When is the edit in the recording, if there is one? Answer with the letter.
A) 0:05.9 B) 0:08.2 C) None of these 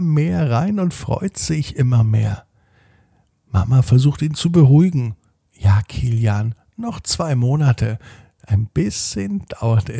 C